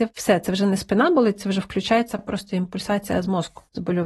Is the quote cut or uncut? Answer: uncut